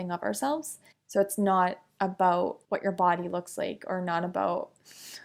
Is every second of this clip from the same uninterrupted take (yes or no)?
no